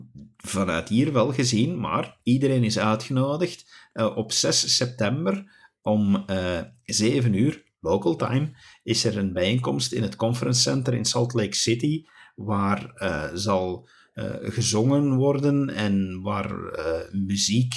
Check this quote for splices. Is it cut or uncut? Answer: uncut